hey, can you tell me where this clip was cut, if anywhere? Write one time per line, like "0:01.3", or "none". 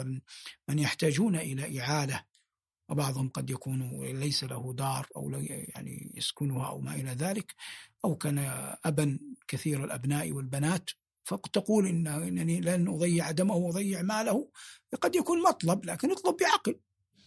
none